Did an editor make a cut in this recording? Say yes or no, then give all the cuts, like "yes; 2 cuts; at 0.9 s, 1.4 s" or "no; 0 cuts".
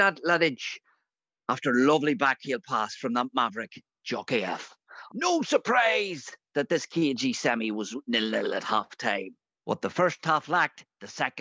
yes; 1 cut; at 5.1 s